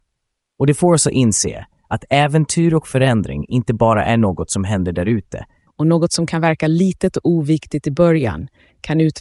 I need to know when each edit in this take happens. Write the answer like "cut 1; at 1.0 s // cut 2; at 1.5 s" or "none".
cut 1; at 5.7 s